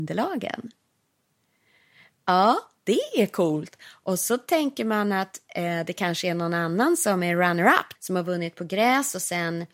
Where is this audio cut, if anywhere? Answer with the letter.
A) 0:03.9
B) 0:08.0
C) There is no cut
B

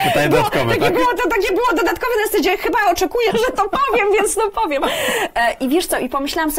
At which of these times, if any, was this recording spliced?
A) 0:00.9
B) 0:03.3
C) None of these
B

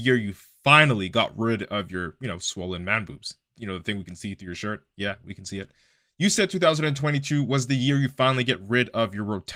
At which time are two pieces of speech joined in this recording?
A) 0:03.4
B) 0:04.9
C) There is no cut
C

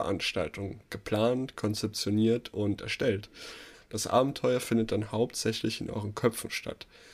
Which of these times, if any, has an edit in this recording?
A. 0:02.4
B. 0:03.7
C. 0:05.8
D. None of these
B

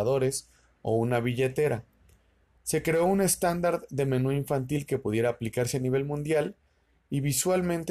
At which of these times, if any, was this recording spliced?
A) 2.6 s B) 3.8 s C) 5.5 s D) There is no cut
A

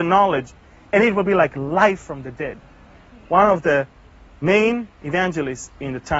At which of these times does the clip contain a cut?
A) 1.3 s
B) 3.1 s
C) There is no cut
B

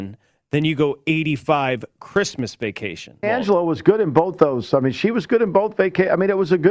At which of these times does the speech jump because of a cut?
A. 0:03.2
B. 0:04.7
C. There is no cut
A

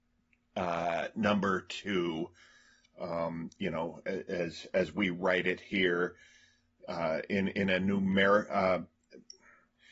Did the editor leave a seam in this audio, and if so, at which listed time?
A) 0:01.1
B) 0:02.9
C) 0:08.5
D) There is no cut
D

